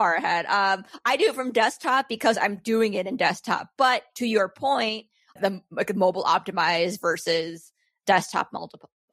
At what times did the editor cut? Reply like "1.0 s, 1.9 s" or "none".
5.4 s